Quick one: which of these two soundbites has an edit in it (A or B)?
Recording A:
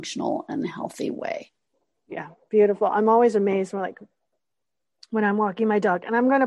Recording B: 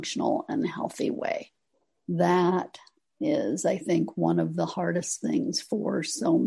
B